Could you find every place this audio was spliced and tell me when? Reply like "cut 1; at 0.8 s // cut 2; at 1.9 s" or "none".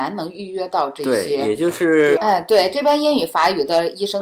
cut 1; at 2.2 s